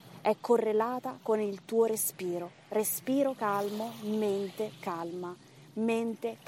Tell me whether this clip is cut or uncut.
uncut